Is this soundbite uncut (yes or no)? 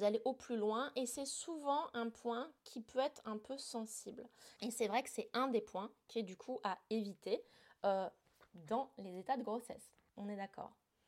no